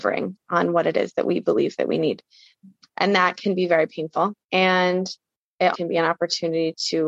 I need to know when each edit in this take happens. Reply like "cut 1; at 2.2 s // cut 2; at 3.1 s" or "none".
cut 1; at 4.4 s // cut 2; at 5.7 s